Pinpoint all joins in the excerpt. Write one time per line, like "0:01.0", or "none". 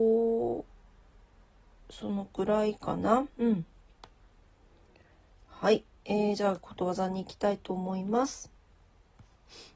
0:03.3

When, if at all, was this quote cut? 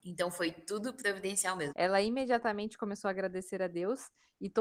0:01.7

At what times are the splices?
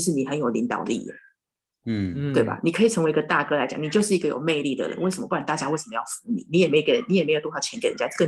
none

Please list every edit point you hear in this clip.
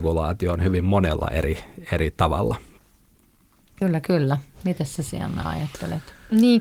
none

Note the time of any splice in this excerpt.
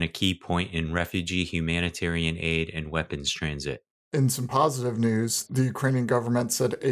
0:03.9

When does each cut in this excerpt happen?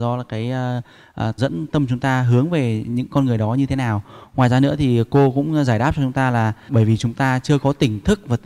0:01.4
0:06.7

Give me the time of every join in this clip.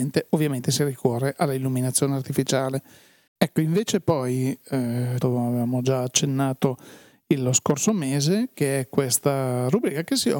0:03.3
0:05.2

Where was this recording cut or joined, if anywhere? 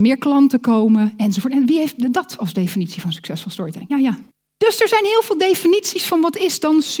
0:03.9

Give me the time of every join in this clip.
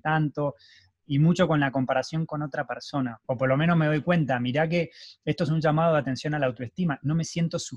0:03.2

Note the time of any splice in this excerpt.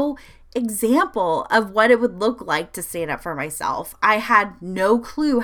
none

